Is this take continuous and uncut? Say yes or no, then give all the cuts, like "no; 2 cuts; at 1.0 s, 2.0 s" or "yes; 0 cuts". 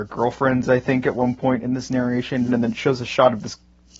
no; 1 cut; at 2.5 s